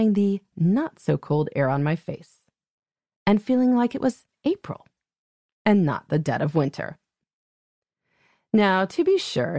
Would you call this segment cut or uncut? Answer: uncut